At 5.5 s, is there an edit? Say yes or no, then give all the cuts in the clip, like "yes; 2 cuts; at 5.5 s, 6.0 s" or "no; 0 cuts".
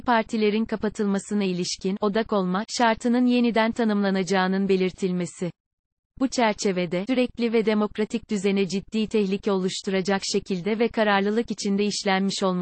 no; 1 cut; at 7.1 s